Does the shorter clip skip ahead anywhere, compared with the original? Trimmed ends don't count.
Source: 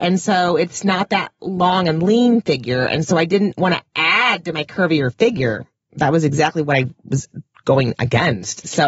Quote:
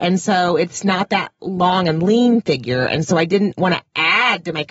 no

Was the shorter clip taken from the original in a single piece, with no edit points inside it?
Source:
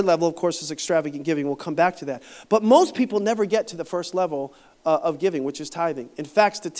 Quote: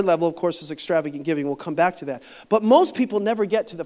yes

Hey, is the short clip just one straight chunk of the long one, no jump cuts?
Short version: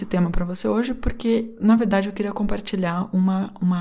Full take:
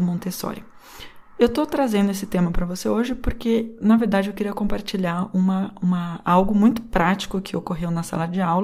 yes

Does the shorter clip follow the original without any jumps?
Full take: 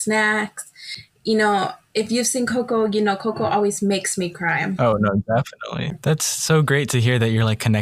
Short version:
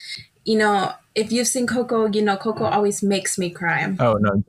yes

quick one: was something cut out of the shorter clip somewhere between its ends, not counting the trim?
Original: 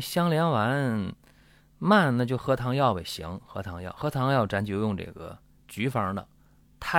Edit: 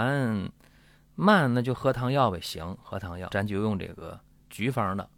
yes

